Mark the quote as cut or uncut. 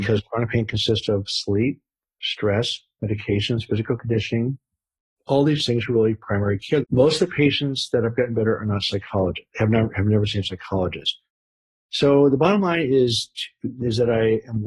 cut